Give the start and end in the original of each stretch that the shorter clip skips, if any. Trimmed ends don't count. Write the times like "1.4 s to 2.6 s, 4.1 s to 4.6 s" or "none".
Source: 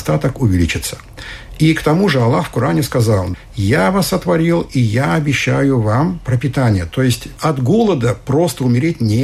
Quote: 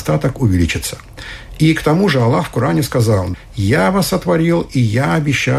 none